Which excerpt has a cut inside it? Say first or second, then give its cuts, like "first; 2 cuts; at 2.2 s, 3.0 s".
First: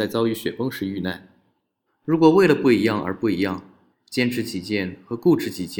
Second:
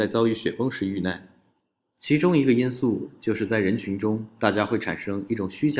first; 2 cuts; at 1.9 s, 3.9 s